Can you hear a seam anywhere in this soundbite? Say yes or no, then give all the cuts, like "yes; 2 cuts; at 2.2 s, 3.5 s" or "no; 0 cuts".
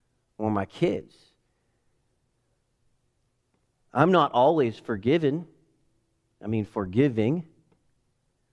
no; 0 cuts